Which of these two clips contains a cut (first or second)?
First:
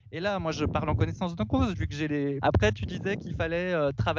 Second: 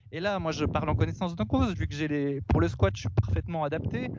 first